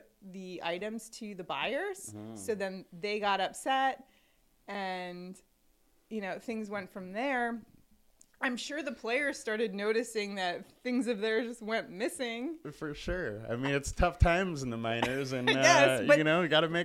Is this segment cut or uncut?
uncut